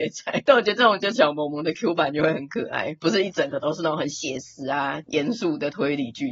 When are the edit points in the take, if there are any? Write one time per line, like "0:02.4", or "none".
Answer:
0:01.2